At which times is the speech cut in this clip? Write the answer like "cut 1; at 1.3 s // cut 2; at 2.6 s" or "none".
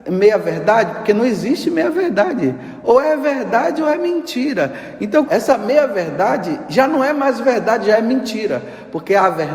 cut 1; at 5.3 s